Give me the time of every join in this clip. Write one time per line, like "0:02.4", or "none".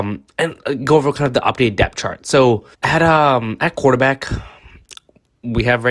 0:02.7